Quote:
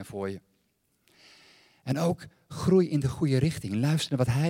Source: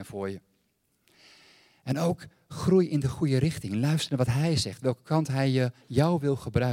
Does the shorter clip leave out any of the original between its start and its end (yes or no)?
no